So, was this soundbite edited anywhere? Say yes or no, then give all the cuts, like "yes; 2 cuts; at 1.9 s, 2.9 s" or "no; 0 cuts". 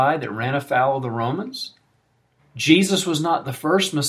yes; 1 cut; at 2.4 s